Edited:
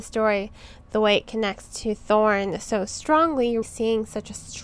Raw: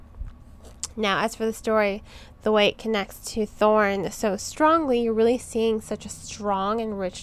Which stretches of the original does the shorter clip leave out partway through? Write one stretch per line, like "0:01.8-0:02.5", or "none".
0:05.1-0:05.4